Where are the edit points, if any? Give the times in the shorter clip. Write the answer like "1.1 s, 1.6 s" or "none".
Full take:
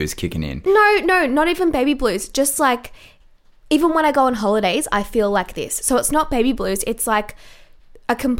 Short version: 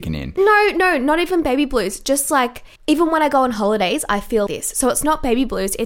2.8 s, 4.5 s